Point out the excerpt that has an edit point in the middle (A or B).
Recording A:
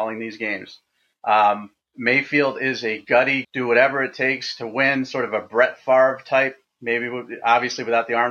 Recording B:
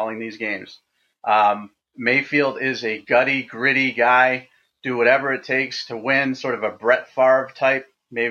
A